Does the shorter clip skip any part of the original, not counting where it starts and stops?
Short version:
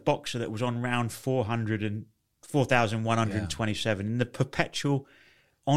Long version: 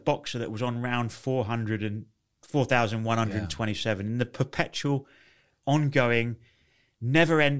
no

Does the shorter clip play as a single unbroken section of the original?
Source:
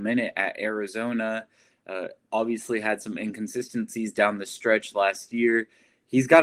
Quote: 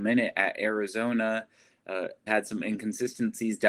no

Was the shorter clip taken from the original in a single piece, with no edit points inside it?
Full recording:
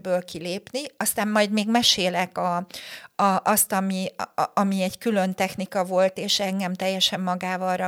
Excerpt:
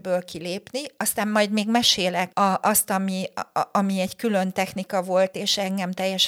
no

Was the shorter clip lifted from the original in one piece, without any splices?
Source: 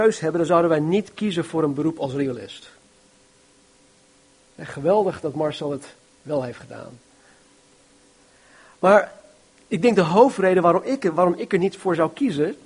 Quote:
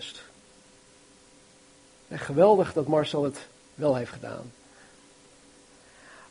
yes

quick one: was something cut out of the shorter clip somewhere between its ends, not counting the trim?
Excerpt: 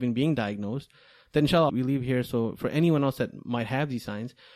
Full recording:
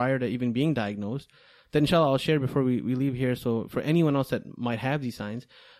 yes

